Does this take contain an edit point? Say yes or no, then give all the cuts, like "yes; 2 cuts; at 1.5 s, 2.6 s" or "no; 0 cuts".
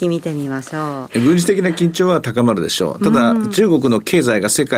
yes; 1 cut; at 1.1 s